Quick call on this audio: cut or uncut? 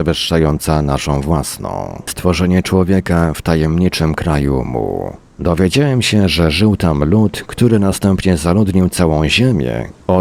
cut